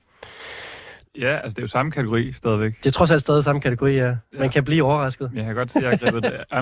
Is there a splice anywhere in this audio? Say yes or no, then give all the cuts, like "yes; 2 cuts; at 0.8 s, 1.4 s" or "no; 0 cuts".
yes; 1 cut; at 1.0 s